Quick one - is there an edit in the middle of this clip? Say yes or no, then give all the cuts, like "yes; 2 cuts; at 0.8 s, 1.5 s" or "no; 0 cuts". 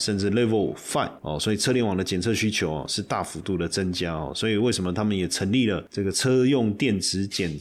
no; 0 cuts